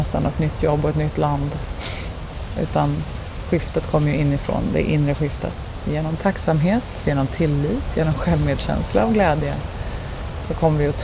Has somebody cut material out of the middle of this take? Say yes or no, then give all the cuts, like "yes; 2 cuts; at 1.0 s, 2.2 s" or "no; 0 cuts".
yes; 1 cut; at 7.0 s